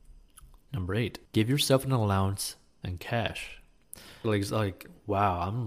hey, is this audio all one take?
no; 2 cuts; at 1.3 s, 4.2 s

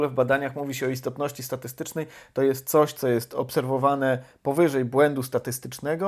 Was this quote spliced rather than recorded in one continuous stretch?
no; 0 cuts

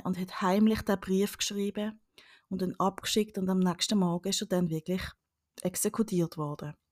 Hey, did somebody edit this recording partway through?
no; 0 cuts

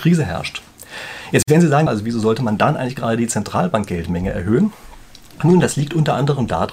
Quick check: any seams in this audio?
yes; 1 cut; at 1.9 s

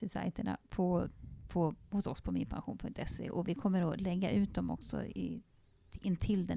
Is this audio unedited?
yes; 0 cuts

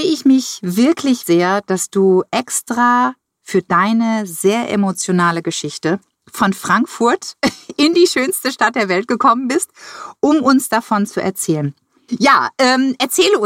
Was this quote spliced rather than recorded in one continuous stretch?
yes; 2 cuts; at 1.2 s, 12.1 s

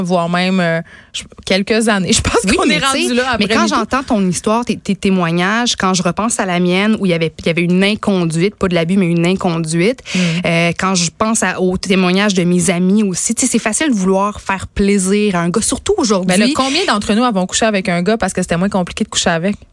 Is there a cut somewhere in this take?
no; 0 cuts

